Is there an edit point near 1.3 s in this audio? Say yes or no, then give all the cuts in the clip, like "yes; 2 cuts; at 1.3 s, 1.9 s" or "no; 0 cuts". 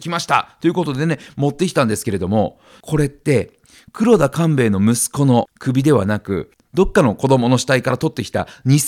no; 1 cut; at 2.8 s